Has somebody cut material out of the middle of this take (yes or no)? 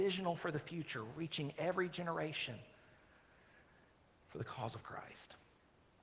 no